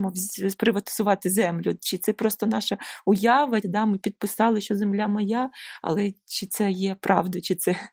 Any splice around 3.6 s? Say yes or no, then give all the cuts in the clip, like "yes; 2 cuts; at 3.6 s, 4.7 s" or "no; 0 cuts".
yes; 1 cut; at 3.6 s